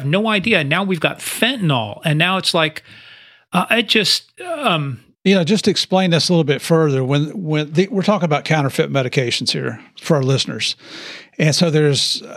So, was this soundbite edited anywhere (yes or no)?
yes